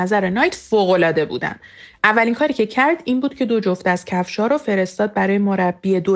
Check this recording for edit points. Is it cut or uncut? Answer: uncut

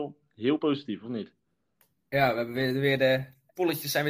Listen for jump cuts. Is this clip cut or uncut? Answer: uncut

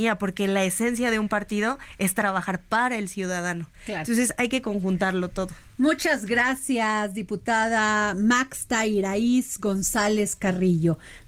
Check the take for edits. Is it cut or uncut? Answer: uncut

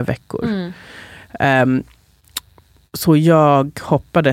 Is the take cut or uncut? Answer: uncut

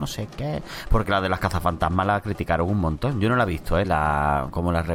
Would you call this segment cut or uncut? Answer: cut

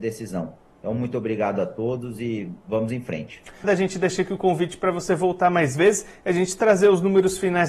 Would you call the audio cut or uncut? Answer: cut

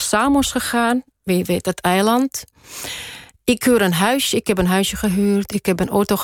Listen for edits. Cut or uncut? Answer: uncut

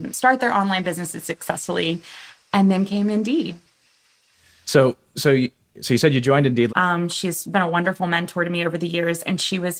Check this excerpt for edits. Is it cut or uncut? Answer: cut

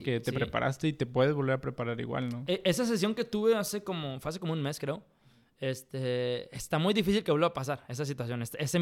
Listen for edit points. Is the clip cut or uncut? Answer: uncut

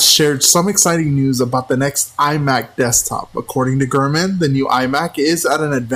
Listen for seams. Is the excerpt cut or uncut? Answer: uncut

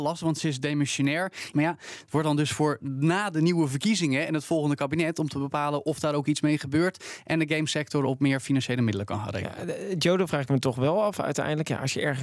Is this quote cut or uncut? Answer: cut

